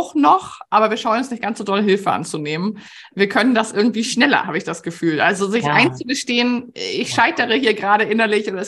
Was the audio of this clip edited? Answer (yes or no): no